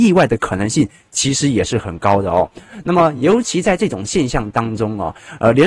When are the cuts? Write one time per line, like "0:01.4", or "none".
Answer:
none